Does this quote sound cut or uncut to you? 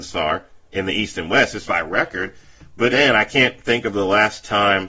cut